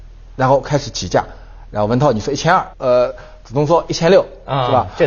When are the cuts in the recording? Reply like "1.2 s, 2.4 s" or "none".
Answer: 2.7 s